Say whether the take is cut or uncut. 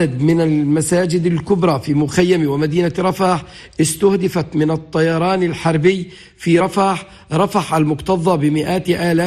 uncut